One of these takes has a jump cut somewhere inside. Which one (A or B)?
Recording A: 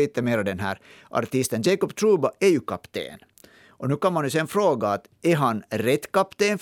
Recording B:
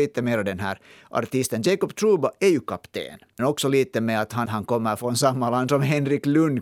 B